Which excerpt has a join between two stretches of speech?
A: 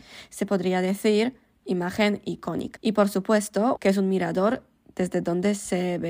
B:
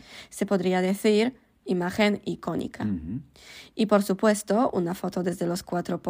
A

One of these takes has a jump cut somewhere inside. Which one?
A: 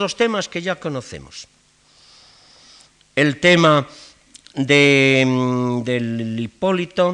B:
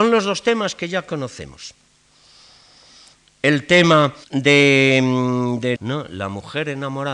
B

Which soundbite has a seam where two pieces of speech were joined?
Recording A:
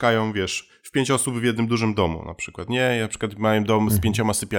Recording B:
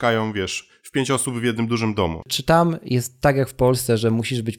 B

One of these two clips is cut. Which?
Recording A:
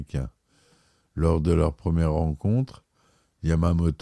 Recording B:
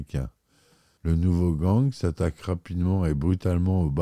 B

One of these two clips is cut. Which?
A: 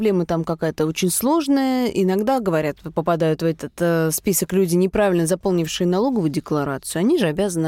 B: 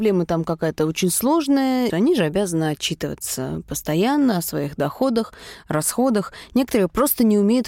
B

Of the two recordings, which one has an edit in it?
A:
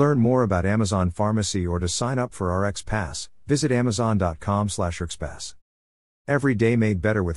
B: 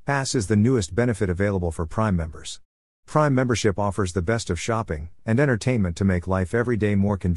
B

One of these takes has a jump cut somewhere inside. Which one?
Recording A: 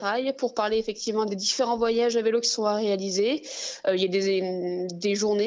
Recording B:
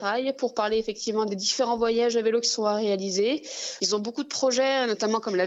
B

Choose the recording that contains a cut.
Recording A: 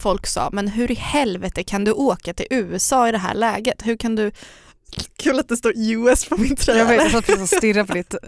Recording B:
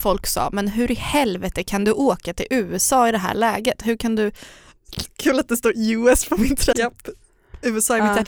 B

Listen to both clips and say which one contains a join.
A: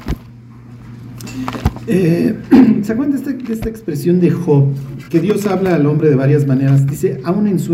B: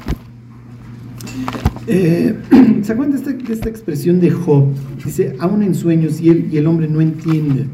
B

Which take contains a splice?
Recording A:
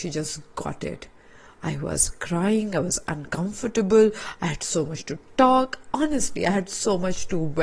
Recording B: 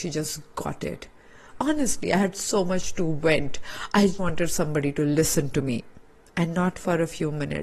B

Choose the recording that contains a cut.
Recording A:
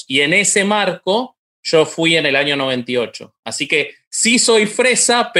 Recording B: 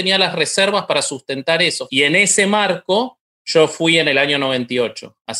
B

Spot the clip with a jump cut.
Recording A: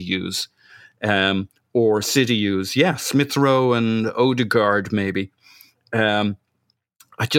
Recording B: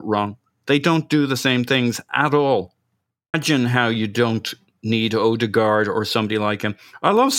B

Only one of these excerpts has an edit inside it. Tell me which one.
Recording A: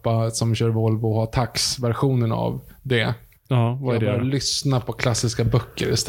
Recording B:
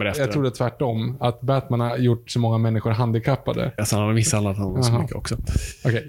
B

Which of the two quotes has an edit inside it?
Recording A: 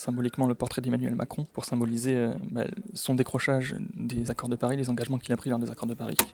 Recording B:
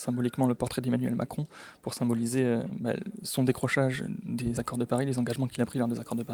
A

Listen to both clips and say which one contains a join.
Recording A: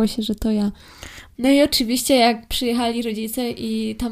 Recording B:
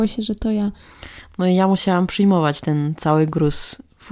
A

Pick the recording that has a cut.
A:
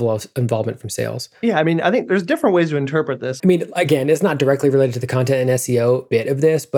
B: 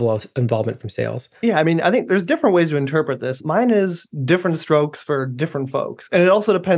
A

